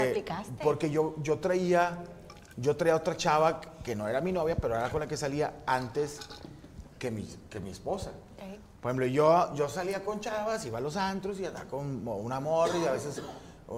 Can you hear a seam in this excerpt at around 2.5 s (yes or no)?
no